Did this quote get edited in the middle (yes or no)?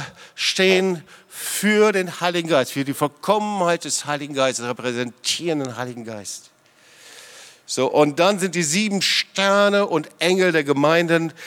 no